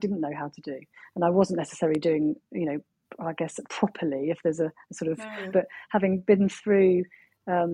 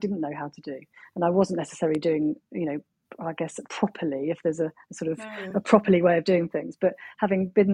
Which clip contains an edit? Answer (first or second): first